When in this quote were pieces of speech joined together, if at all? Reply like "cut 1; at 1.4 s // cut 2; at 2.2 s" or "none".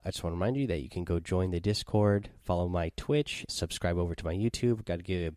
cut 1; at 3.5 s